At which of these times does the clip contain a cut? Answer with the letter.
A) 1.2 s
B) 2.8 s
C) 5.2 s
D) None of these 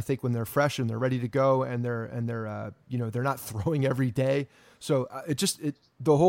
D